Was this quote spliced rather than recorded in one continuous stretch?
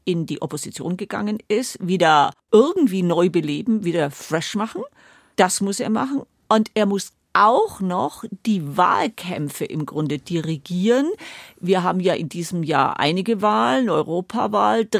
no; 0 cuts

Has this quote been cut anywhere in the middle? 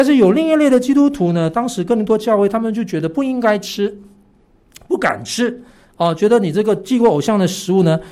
no; 0 cuts

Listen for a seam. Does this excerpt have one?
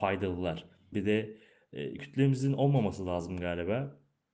yes; 2 cuts; at 0.9 s, 2.0 s

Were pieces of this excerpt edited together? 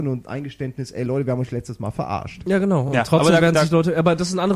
no; 0 cuts

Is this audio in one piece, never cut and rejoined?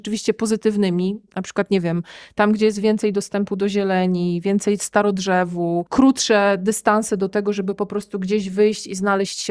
yes; 0 cuts

